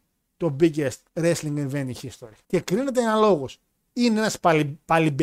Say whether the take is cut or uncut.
cut